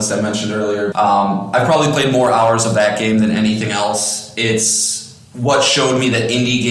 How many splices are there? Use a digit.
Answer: 1